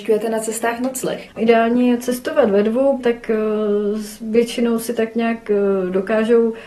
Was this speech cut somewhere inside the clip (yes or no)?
yes